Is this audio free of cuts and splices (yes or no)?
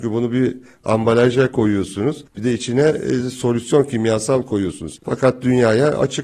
no